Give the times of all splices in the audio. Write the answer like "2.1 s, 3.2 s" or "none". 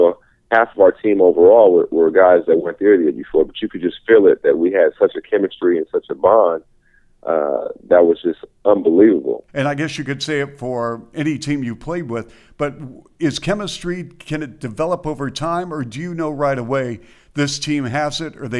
9.5 s